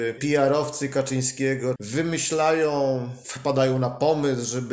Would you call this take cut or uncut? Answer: cut